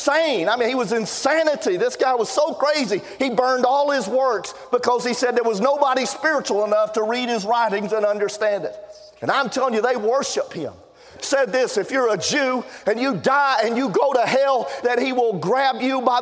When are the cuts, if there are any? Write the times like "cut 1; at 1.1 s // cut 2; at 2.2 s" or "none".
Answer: cut 1; at 11.2 s // cut 2; at 14.8 s